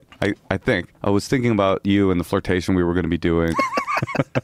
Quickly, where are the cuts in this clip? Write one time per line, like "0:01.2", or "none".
0:01.0
0:03.5